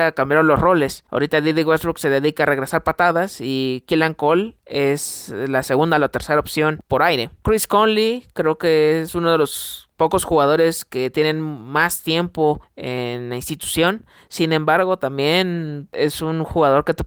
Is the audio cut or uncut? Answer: uncut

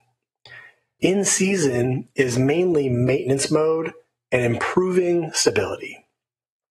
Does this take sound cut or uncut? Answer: cut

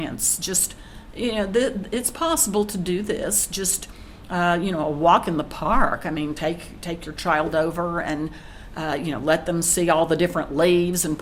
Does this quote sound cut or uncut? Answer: uncut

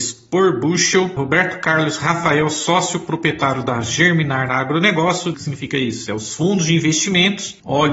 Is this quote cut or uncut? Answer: cut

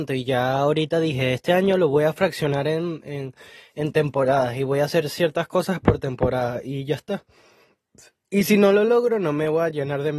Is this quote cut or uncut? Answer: uncut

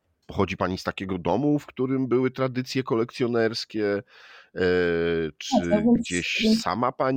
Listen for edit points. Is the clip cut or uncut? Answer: uncut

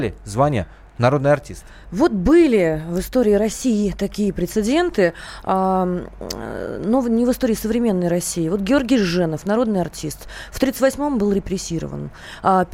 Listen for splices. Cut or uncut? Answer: uncut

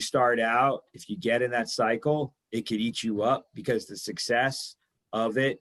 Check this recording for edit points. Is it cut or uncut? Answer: uncut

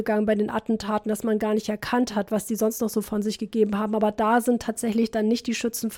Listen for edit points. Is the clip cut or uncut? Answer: uncut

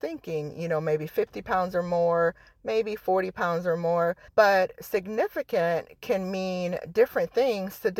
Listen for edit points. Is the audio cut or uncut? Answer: cut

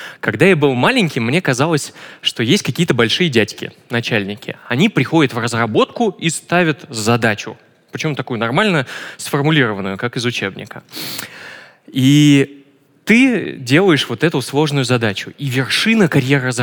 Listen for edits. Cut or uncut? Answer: uncut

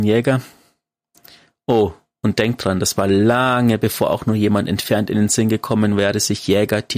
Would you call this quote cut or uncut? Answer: uncut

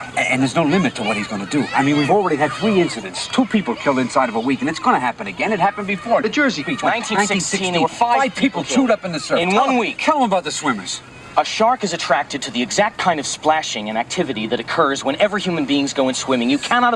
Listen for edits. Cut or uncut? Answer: uncut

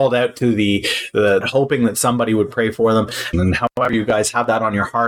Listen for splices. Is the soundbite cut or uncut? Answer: cut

